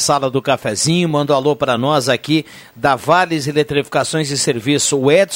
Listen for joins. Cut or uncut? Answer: uncut